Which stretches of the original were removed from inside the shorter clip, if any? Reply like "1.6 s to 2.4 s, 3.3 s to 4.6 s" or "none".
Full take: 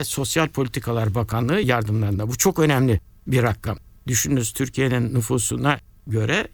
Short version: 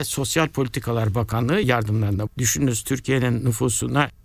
2.3 s to 4.0 s